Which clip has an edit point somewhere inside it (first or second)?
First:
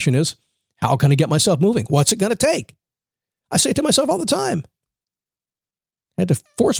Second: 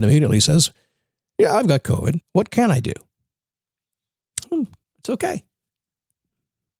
second